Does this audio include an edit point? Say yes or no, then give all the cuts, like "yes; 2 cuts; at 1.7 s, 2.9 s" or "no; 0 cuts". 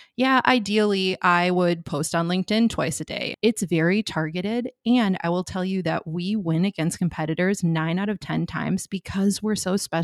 yes; 1 cut; at 3.3 s